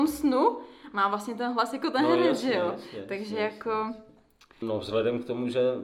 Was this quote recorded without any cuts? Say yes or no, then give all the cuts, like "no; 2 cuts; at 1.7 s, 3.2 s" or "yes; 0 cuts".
no; 1 cut; at 4.6 s